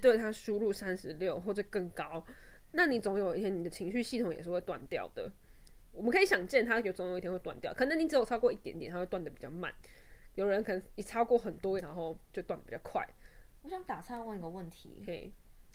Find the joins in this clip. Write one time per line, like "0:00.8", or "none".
0:05.9
0:11.8